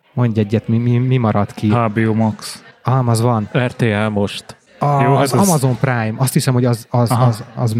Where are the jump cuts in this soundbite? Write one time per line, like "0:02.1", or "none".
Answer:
none